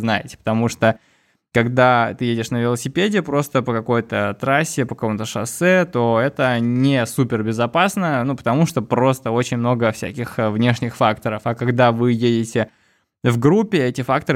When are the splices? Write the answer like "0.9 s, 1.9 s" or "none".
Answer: none